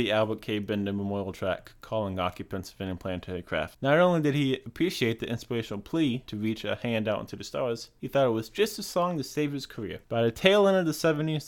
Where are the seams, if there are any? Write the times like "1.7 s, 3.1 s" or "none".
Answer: 10.0 s